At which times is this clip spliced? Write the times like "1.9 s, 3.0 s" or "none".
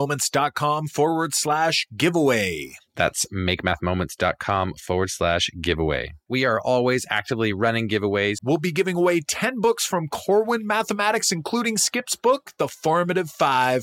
6.3 s, 8.4 s

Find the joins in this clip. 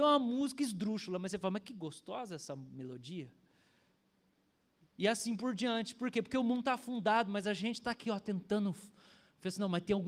none

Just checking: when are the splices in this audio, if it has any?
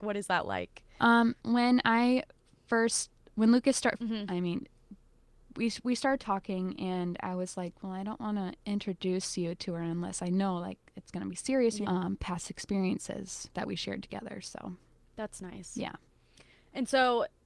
1.4 s, 4.0 s, 11.8 s

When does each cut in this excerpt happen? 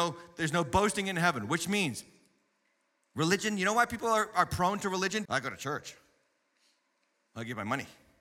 5.3 s

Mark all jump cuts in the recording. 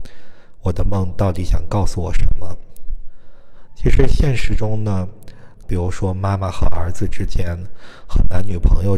3.7 s, 5.6 s

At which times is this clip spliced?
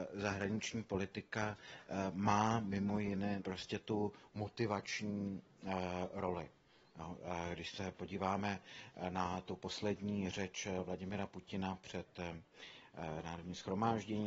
3.4 s

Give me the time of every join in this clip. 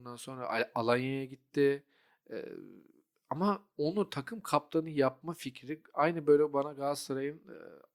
none

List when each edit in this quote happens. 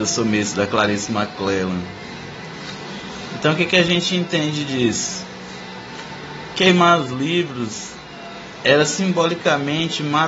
none

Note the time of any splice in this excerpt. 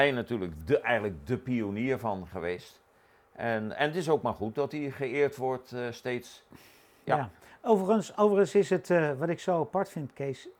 none

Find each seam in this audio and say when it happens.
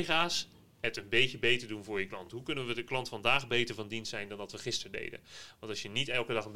none

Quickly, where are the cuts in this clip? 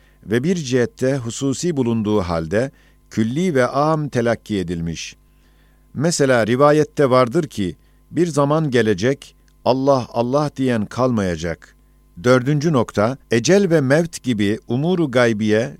12.2 s, 13.2 s

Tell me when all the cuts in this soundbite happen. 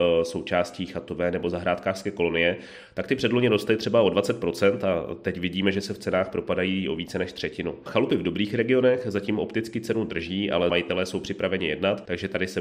none

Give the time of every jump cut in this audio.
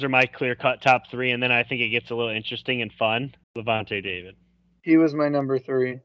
3.4 s

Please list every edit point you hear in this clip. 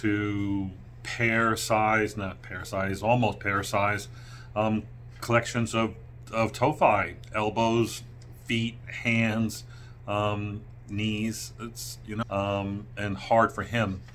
12.2 s

